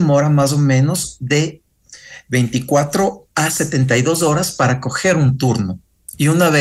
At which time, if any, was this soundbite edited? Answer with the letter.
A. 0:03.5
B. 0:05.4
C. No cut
C